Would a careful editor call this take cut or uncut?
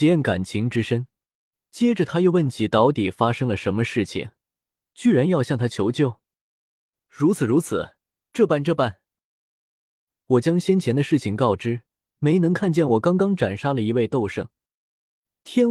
cut